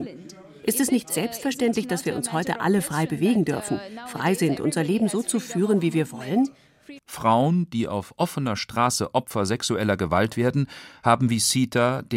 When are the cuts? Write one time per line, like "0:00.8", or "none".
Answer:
0:07.0